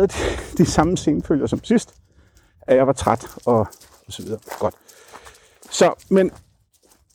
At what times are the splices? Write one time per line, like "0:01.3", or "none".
none